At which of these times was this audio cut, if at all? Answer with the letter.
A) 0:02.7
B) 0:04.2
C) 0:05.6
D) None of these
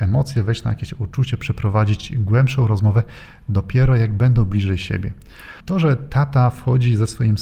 C